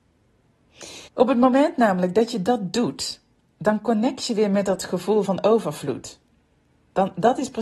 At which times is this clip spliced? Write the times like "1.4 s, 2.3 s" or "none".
1.1 s